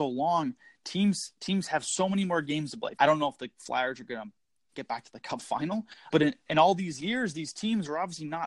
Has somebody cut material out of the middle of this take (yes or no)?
yes